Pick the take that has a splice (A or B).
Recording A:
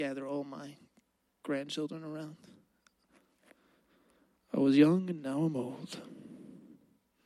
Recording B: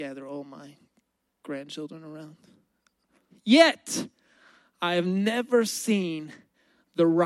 B